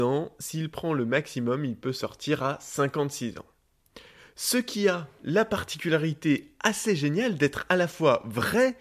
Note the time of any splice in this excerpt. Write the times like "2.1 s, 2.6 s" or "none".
none